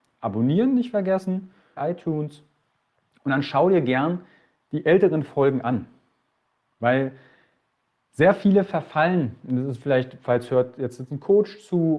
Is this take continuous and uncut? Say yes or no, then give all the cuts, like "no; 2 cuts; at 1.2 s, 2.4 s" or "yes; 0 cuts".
no; 1 cut; at 1.8 s